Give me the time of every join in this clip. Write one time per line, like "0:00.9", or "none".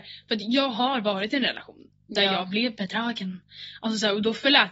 none